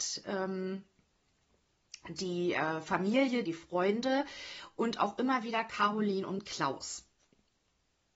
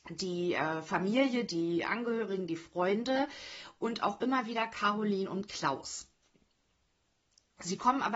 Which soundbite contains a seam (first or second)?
first